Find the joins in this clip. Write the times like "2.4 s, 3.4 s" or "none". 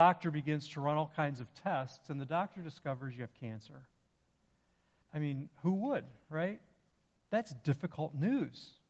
5.0 s